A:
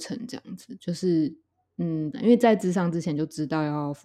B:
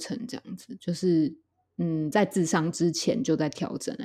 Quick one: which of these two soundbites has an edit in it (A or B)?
A